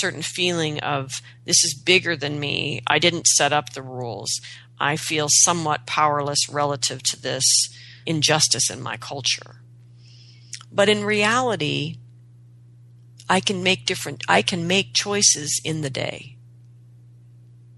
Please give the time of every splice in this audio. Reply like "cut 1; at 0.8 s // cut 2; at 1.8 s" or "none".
cut 1; at 8.0 s